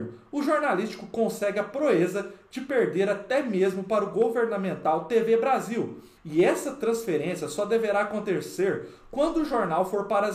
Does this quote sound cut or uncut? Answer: cut